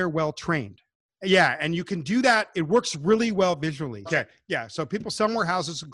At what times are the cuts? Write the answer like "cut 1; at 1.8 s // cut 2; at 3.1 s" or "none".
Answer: cut 1; at 1.1 s // cut 2; at 4.1 s